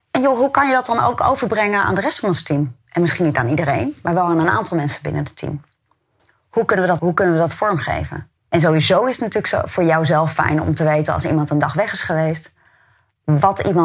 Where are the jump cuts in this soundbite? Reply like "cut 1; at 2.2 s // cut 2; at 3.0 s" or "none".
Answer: cut 1; at 7.0 s // cut 2; at 8.4 s